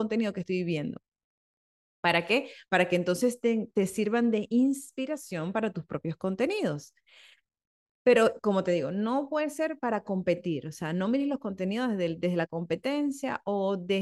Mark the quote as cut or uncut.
uncut